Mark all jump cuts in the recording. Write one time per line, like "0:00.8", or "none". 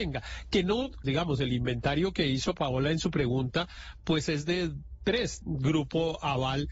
0:01.0
0:05.4

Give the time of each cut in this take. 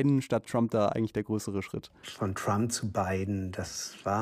0:02.0

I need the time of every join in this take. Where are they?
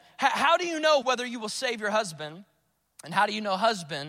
0:01.0

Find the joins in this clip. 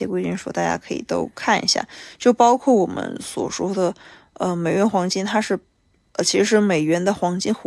none

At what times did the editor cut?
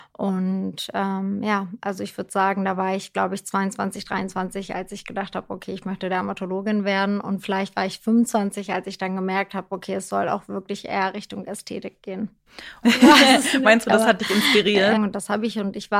0:12.8
0:15.0

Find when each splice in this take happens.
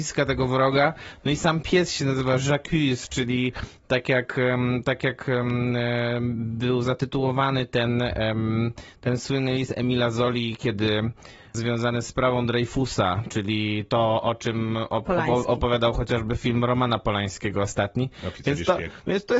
none

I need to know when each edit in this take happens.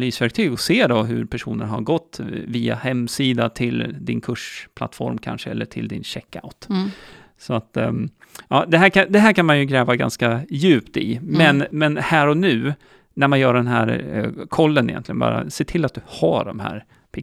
none

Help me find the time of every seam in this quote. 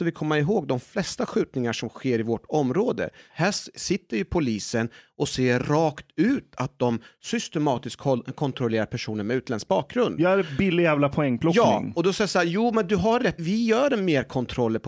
0:03.3
0:13.4

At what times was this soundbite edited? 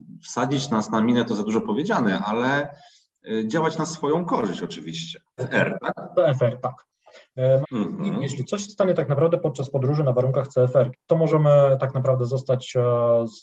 0:05.4
0:07.6
0:10.9

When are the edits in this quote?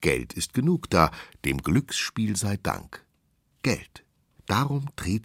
none

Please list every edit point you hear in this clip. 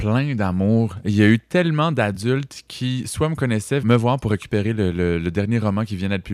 0:03.8

